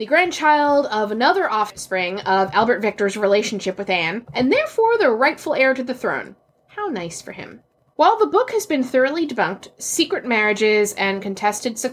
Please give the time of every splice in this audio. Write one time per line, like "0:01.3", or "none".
none